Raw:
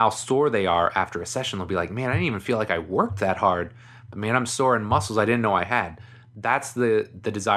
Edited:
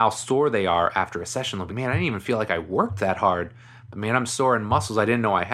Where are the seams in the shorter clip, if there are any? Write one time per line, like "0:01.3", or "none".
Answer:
0:01.7